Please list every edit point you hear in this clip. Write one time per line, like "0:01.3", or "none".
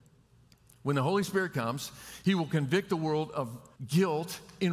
0:03.8

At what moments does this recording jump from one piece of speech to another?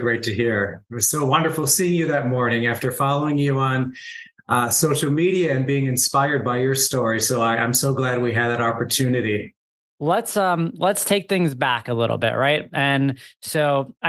none

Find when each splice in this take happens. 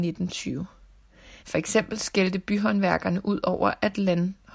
0:01.4

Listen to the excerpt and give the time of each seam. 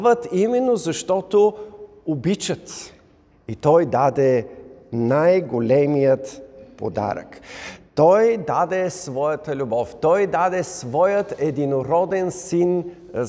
0:03.3

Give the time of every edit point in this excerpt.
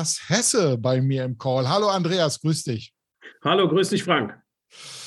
none

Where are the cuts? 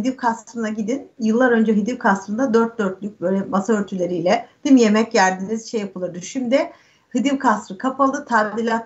none

